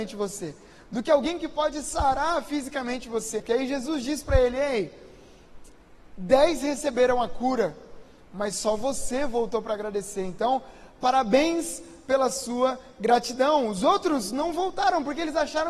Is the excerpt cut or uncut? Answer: cut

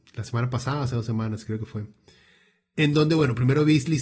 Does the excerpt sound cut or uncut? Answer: uncut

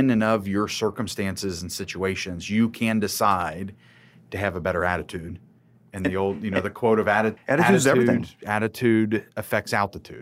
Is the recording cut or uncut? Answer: cut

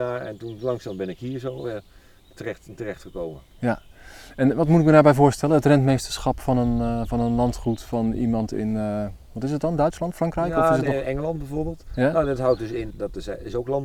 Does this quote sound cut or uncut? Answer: cut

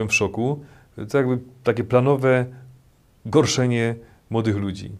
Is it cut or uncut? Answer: uncut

